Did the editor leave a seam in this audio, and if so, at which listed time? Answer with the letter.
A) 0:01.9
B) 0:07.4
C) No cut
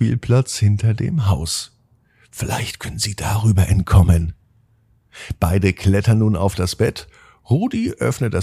C